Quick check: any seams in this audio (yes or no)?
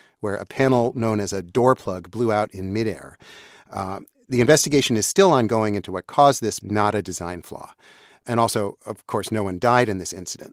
yes